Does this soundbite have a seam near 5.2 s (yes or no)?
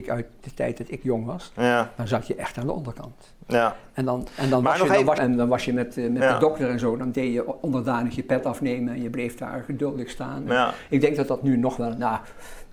yes